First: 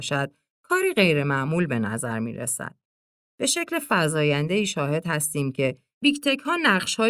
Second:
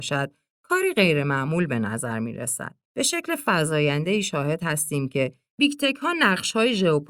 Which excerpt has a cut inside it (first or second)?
second